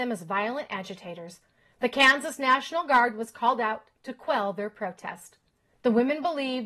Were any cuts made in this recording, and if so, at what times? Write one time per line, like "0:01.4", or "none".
0:05.7